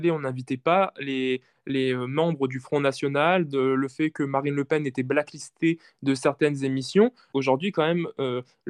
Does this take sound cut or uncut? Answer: cut